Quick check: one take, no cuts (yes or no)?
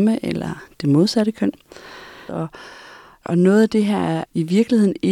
no